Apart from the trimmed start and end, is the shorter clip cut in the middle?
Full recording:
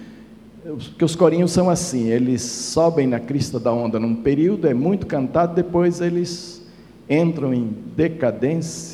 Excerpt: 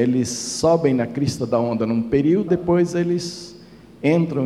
yes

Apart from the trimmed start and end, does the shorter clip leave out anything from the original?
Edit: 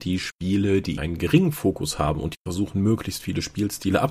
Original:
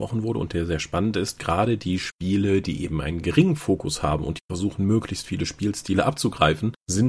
yes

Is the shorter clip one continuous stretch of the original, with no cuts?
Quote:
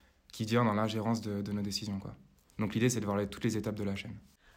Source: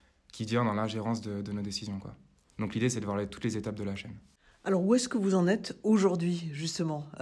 yes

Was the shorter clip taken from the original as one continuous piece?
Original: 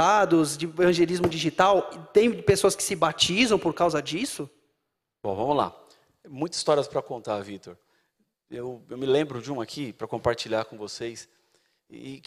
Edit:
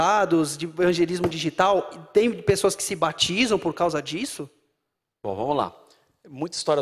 yes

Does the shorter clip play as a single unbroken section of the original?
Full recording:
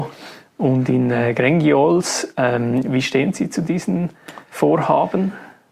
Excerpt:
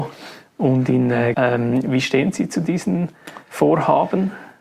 no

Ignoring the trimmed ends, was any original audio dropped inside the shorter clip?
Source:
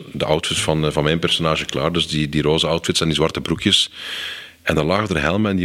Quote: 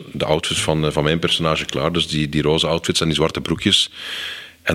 no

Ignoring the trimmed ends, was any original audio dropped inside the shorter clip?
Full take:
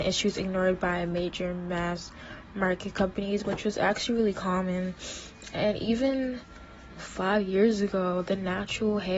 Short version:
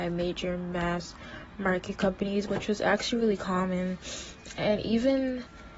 no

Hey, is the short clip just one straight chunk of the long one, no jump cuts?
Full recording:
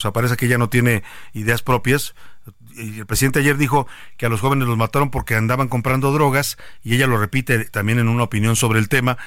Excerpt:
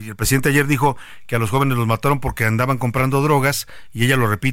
yes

